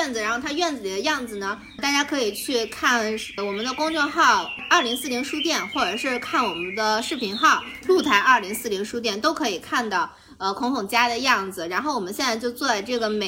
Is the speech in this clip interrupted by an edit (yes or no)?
no